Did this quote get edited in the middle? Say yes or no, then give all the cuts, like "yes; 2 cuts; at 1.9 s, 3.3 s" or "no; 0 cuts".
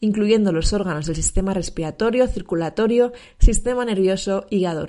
no; 0 cuts